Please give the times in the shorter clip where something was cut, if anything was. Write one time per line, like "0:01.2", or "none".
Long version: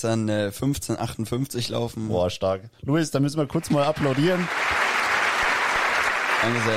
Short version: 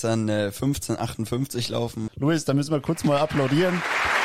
0:02.1